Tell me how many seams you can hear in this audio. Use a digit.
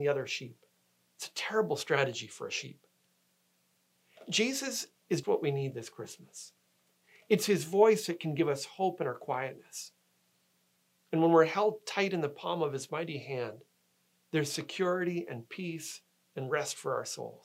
2